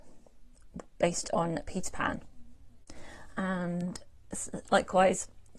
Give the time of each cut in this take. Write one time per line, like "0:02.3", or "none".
0:03.3